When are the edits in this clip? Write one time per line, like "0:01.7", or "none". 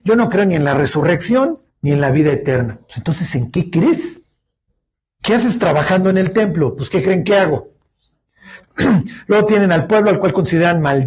0:01.7
0:08.6